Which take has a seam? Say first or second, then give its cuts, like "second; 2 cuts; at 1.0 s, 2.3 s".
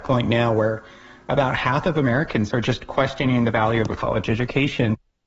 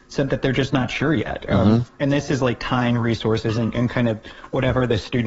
second; 1 cut; at 1.4 s